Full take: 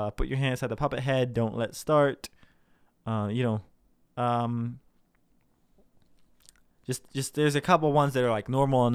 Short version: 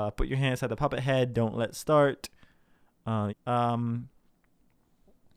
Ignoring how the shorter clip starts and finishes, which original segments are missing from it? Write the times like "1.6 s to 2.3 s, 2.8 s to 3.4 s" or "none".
3.3 s to 4.0 s